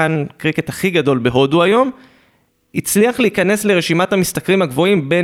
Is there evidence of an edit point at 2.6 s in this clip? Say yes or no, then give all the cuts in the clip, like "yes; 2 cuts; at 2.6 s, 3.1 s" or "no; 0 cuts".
no; 0 cuts